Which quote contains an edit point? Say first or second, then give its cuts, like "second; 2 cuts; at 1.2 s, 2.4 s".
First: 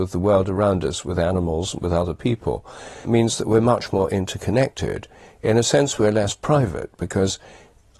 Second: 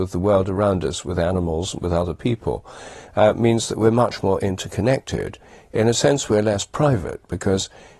first; 1 cut; at 3.0 s